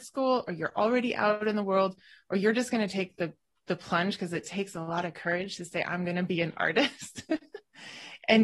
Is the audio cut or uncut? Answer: uncut